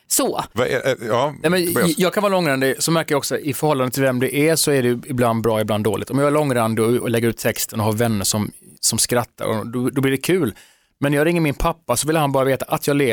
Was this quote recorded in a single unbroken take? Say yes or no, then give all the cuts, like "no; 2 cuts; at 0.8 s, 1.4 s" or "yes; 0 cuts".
yes; 0 cuts